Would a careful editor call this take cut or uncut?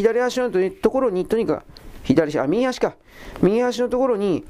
uncut